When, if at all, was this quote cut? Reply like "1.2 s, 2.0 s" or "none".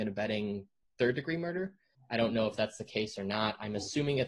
1.9 s